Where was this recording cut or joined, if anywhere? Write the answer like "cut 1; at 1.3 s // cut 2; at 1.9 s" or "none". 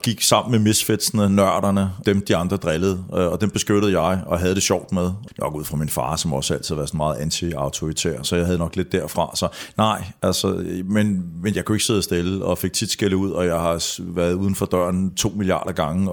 cut 1; at 8.2 s